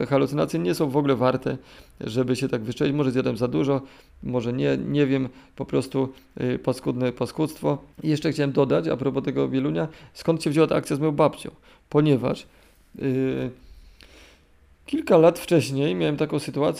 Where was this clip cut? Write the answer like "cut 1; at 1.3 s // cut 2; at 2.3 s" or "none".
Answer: cut 1; at 7.9 s